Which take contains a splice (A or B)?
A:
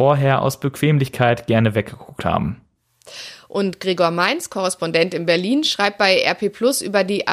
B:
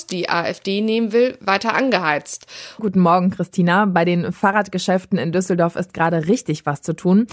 B